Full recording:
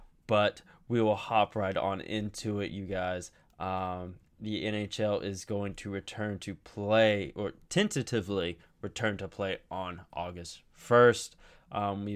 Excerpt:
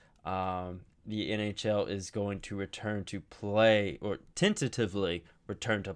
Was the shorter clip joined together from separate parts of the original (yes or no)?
no